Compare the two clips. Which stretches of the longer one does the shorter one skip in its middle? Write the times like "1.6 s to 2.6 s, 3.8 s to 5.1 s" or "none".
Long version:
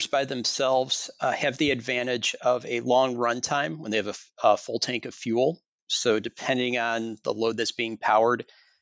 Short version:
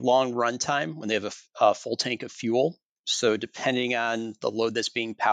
none